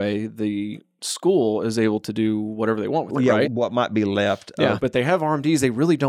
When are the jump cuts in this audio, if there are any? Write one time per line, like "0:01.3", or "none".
0:03.4
0:04.8